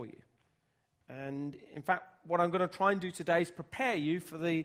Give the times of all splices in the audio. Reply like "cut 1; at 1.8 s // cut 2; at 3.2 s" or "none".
none